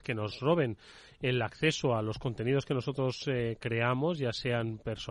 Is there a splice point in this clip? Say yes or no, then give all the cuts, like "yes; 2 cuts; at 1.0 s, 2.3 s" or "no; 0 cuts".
no; 0 cuts